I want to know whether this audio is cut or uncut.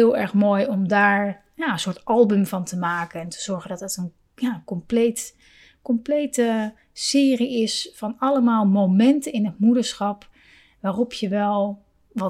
uncut